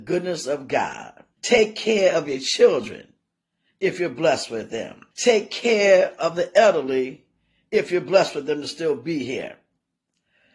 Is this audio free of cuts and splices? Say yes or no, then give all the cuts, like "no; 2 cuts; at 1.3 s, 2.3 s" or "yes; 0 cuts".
no; 2 cuts; at 1.4 s, 5.1 s